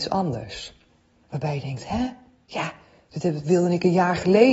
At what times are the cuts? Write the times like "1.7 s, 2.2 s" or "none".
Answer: 1.2 s